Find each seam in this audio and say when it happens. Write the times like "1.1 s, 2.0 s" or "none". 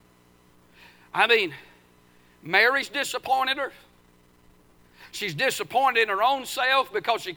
none